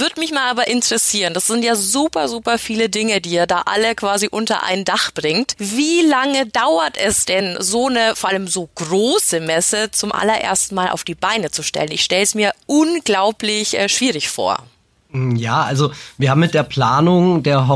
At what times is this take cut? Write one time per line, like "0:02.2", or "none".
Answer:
none

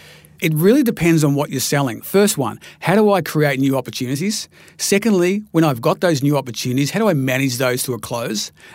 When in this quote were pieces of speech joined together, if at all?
0:02.0

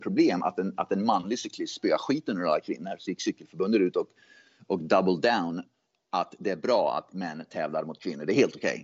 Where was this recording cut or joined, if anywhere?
none

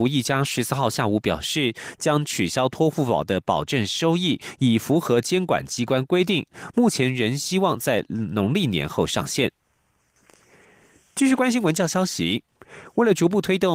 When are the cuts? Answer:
none

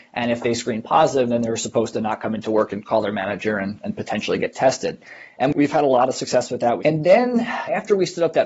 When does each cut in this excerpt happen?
0:06.8

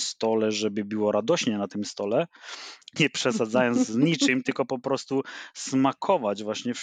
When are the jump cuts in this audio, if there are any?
0:03.0

